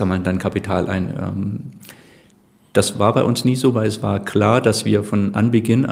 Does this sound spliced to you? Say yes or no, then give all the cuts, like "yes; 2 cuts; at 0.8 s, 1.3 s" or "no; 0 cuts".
no; 0 cuts